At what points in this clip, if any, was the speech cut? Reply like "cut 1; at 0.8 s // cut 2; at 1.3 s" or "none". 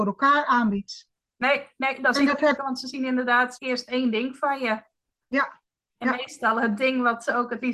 cut 1; at 2.6 s // cut 2; at 3.6 s